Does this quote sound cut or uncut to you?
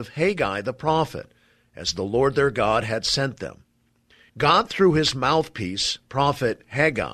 cut